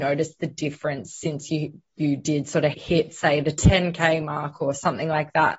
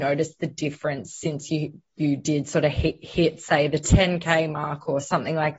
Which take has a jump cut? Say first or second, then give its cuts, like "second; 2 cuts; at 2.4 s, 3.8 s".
first; 1 cut; at 2.7 s